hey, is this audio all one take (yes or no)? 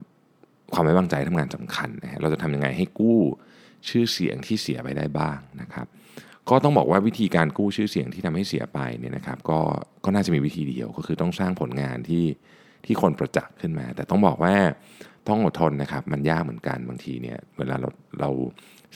yes